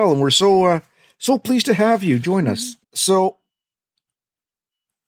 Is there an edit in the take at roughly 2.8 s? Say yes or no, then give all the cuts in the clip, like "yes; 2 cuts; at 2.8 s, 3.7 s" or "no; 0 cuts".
yes; 1 cut; at 2.8 s